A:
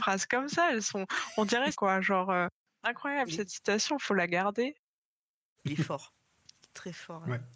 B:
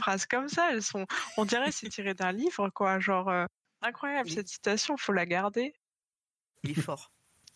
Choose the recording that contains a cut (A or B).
A